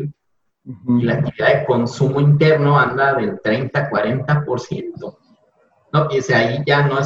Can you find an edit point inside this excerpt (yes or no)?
no